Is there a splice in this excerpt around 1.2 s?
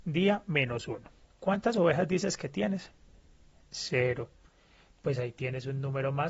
yes; 1 cut; at 1.2 s

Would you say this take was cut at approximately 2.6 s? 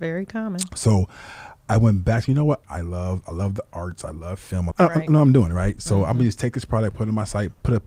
yes; 2 cuts; at 2.6 s, 4.7 s

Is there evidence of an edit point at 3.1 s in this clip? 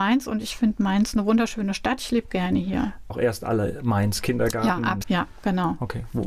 yes; 2 cuts; at 3.1 s, 5.0 s

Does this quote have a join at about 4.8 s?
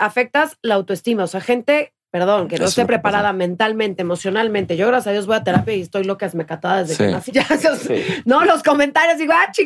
no; 1 cut; at 7.3 s

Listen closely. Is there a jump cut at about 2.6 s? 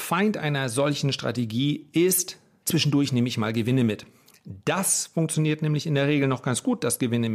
yes; 1 cut; at 2.6 s

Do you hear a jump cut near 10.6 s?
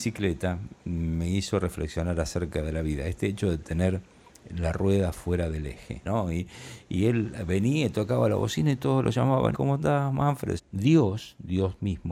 yes; 3 cuts; at 6.0 s, 9.5 s, 10.6 s

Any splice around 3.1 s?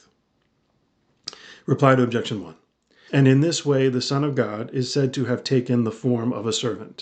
yes; 1 cut; at 3.1 s

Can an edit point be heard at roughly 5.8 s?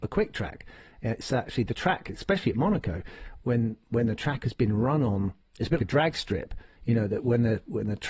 yes; 2 cuts; at 3.4 s, 5.8 s

